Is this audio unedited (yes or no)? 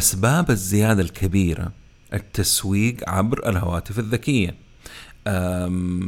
yes